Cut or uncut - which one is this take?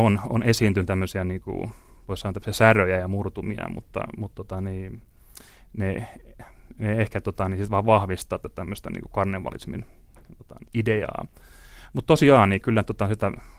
cut